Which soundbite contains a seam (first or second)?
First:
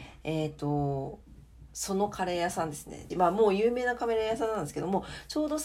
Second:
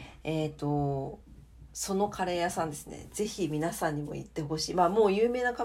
first